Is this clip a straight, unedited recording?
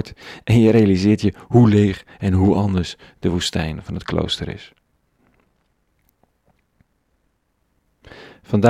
yes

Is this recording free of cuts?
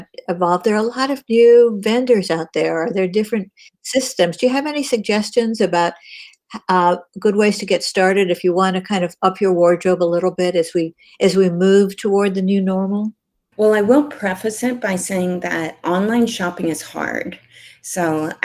no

